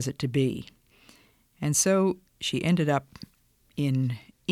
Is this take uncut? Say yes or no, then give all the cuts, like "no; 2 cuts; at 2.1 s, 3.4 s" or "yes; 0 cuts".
yes; 0 cuts